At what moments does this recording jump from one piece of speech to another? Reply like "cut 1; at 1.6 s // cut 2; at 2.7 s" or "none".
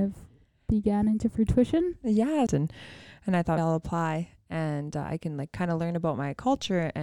cut 1; at 2.5 s // cut 2; at 3.6 s